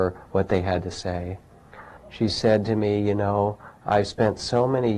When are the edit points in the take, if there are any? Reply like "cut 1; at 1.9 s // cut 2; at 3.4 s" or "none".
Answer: cut 1; at 2.0 s